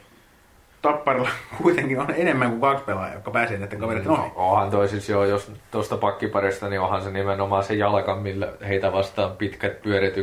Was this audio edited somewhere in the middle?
no; 0 cuts

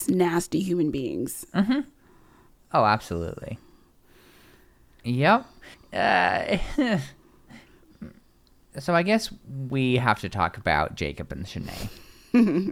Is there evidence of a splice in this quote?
yes; 1 cut; at 5.7 s

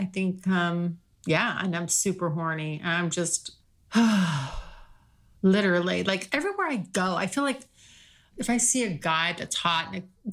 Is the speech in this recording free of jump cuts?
yes; 0 cuts

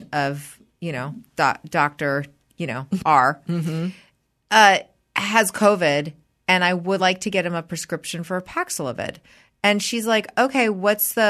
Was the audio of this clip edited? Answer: no; 0 cuts

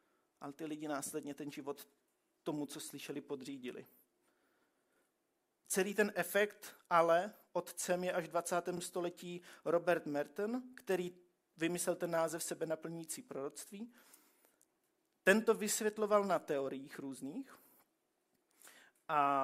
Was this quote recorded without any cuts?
yes; 0 cuts

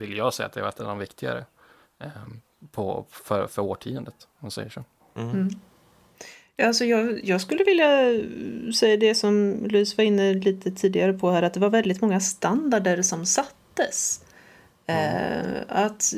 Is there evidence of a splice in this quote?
no; 0 cuts

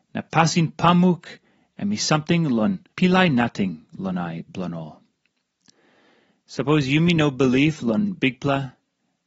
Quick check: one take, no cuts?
no; 1 cut; at 2.9 s

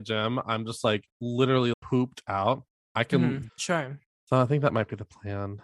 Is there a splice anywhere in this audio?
yes; 2 cuts; at 1.7 s, 3.5 s

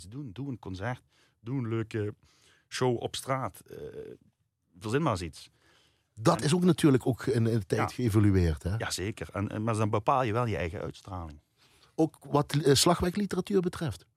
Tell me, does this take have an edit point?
no; 0 cuts

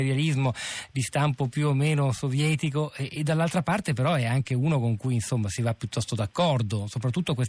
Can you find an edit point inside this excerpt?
no; 0 cuts

